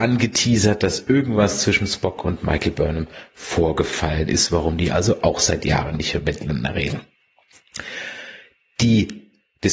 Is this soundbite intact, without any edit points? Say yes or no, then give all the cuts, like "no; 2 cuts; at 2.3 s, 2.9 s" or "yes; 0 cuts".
yes; 0 cuts